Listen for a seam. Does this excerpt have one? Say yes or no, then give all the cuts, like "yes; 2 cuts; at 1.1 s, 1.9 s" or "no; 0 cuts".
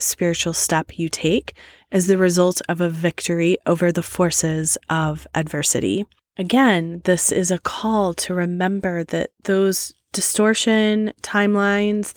no; 0 cuts